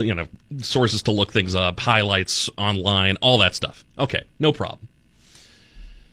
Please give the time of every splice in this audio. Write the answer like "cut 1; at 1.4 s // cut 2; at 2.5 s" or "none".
none